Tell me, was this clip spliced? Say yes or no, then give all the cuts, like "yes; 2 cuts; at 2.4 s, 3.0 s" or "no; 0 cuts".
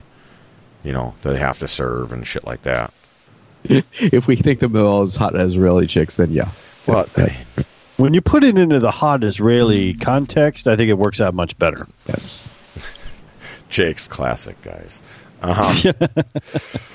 yes; 1 cut; at 14.1 s